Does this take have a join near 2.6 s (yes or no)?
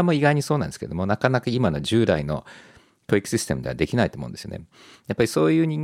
no